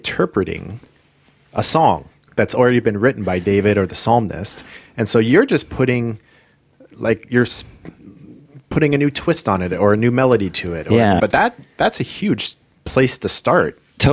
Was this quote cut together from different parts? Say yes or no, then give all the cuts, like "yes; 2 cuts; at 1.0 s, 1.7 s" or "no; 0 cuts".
yes; 2 cuts; at 11.2 s, 12.7 s